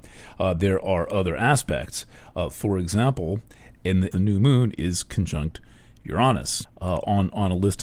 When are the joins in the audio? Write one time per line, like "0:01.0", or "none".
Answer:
0:04.1
0:06.6